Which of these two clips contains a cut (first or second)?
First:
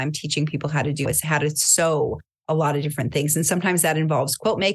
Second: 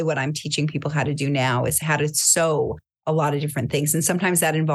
first